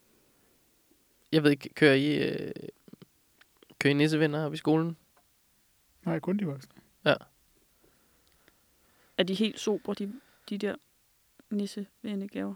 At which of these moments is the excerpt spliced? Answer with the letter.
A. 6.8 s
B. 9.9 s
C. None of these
C